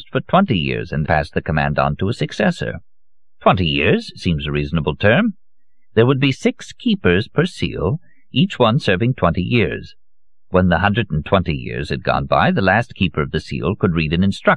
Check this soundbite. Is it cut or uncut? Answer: cut